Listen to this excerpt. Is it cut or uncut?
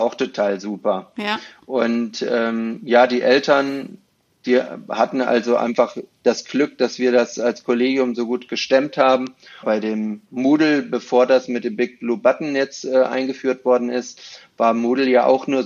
cut